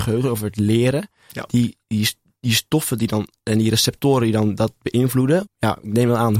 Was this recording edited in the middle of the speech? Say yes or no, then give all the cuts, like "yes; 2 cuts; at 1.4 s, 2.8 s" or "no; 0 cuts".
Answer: yes; 2 cuts; at 1.8 s, 5.5 s